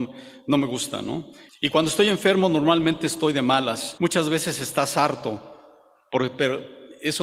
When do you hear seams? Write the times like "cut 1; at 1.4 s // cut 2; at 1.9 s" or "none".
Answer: cut 1; at 1.5 s // cut 2; at 4.0 s